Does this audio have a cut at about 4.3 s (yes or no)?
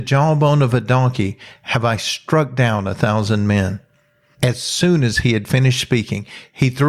no